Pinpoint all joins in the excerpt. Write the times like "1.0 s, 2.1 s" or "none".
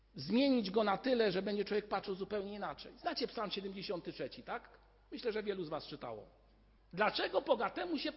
6.8 s